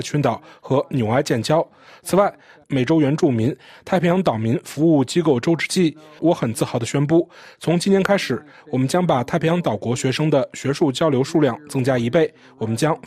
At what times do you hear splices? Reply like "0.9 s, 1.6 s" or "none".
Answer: 2.6 s